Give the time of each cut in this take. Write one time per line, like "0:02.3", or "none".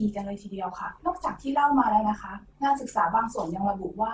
0:01.0